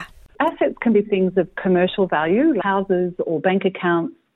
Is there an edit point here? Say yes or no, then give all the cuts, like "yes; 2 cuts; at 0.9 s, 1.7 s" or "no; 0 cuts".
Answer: yes; 1 cut; at 2.6 s